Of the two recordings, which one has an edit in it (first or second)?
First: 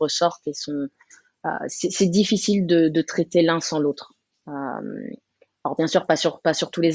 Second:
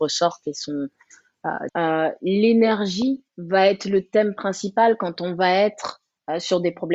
second